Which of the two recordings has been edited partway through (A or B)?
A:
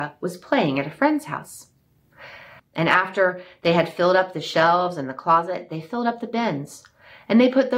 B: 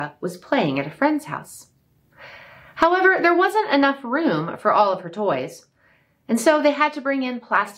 A